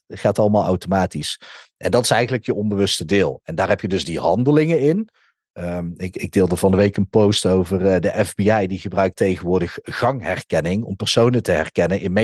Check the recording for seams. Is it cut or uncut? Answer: uncut